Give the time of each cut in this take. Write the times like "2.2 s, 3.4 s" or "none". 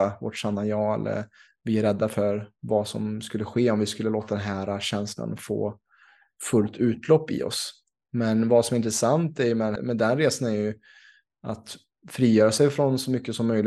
9.8 s